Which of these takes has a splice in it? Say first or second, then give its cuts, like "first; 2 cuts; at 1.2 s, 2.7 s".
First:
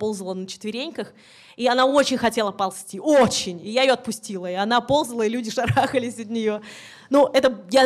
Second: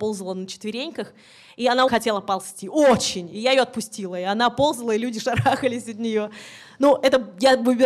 second; 1 cut; at 1.9 s